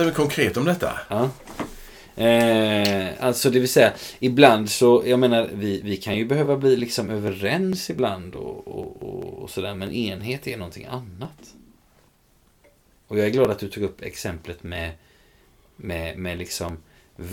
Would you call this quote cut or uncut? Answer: uncut